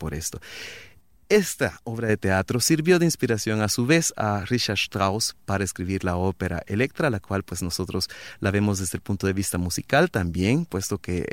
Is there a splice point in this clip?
no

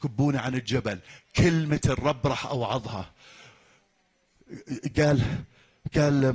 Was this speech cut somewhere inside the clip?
no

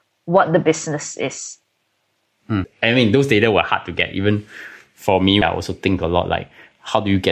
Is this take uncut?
no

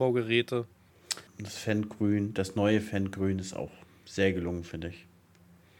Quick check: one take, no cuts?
no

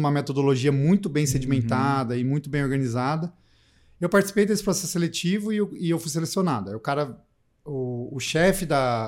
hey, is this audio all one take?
yes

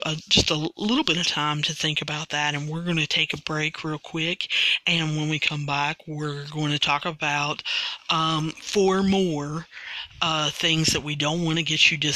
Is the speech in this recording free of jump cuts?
yes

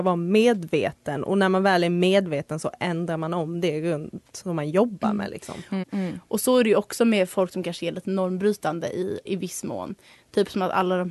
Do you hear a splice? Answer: yes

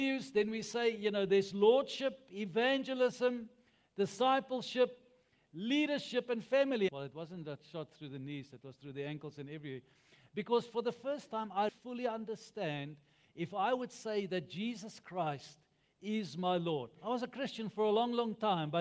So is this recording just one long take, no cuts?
no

